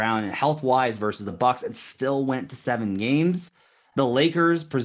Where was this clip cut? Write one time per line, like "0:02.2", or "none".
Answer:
none